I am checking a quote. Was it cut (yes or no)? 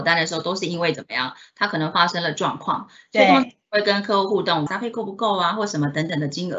yes